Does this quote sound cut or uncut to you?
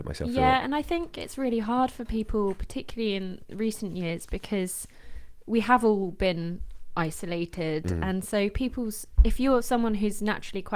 uncut